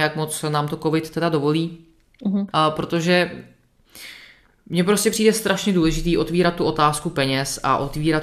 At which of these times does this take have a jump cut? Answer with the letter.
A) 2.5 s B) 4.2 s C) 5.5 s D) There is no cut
A